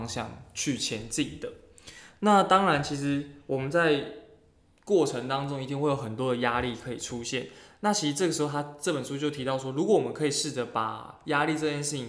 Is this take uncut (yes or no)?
yes